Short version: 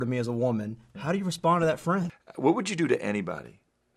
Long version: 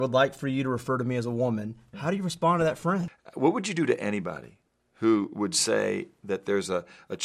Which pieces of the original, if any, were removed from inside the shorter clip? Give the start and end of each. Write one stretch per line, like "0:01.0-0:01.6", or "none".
none